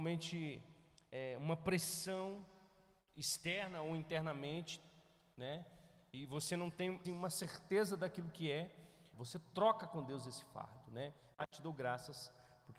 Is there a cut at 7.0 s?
yes; 3 cuts; at 7.0 s, 9.1 s, 11.3 s

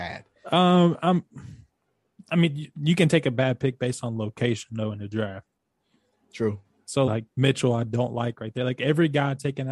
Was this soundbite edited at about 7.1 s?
yes; 1 cut; at 7.1 s

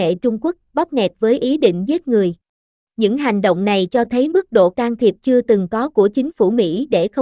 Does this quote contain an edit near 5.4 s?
no; 1 cut; at 2.8 s

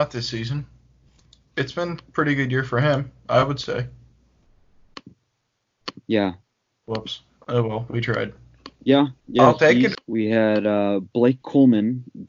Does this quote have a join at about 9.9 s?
yes; 3 cuts; at 6.7 s, 8.8 s, 9.9 s

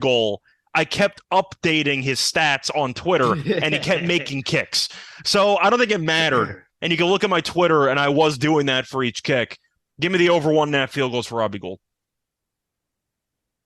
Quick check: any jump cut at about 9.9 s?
yes; 1 cut; at 9.9 s

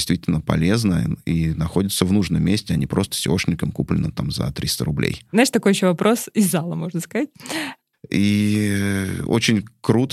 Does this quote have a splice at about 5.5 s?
no; 1 cut; at 7.9 s

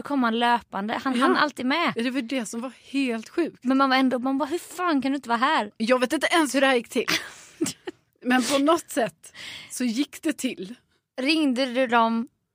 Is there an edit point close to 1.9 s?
no; 1 cut; at 5.8 s

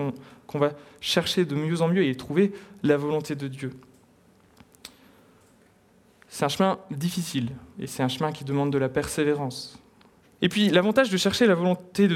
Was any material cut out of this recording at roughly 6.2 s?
no; 2 cuts; at 7.7 s, 10.2 s

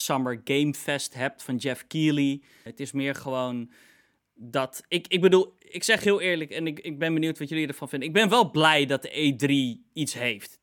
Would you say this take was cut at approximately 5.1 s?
no; 1 cut; at 2.7 s

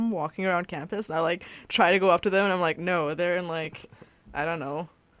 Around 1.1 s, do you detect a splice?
no; 1 cut; at 2.7 s

